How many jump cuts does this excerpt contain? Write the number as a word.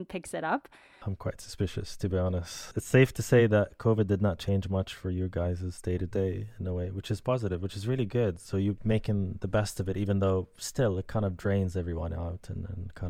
one